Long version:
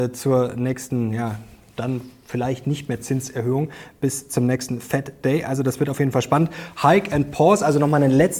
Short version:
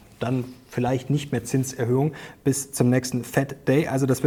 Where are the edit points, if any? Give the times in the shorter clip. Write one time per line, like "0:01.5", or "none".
none